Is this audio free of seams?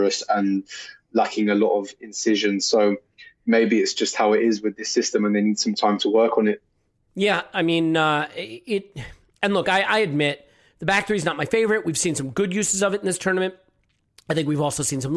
yes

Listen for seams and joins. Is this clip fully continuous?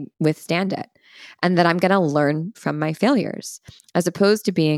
no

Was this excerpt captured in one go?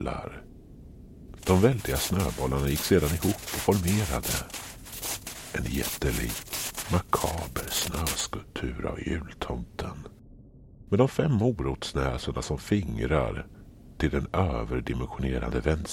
no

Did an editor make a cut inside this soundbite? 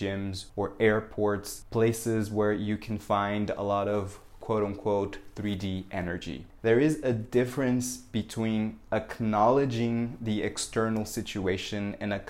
yes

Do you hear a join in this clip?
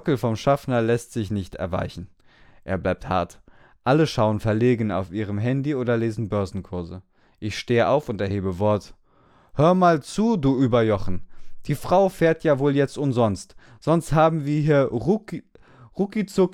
no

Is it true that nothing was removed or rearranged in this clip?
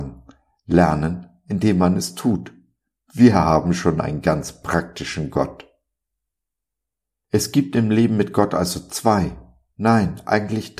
yes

